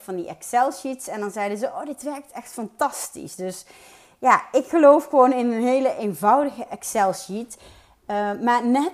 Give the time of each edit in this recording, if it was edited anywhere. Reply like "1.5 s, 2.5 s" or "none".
none